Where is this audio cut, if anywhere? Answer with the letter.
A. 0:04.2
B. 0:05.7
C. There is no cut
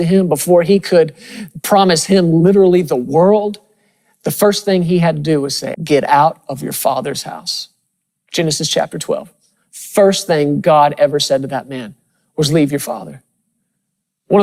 B